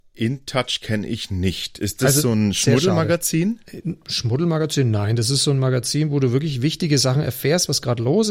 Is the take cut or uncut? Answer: uncut